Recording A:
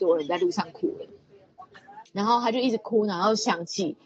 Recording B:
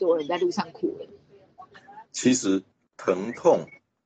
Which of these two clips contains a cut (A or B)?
A